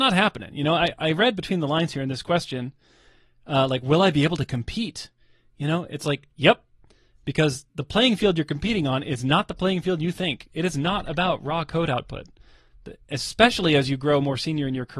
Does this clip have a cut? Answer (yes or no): no